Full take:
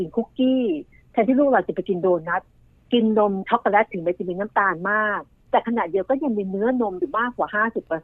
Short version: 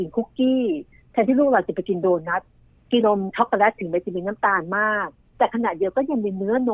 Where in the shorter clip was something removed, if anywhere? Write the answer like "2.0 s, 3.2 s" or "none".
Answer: 3.0 s